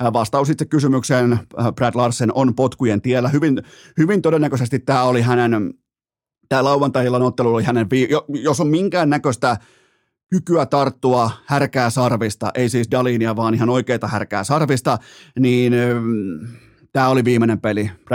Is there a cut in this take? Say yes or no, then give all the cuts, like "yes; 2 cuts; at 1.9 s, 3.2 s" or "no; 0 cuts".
no; 0 cuts